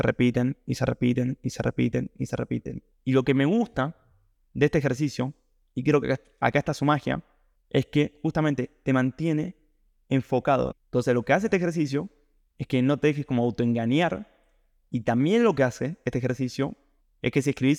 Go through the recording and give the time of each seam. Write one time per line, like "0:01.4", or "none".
0:10.7